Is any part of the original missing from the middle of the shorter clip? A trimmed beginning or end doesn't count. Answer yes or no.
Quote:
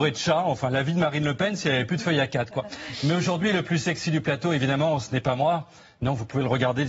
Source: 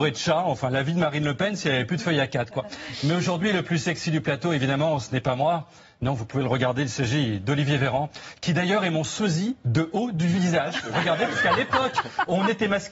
no